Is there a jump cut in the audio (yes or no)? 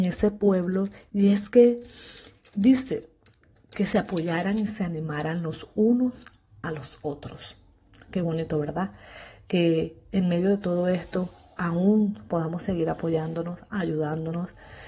no